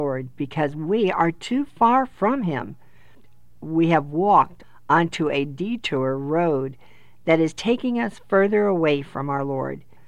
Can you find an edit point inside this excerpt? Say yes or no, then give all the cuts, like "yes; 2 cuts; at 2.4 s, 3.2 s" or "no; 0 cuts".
no; 0 cuts